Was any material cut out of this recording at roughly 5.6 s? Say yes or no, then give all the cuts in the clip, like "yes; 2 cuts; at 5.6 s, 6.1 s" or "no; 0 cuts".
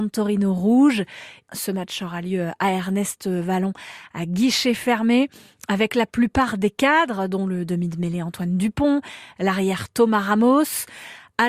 no; 1 cut; at 1.5 s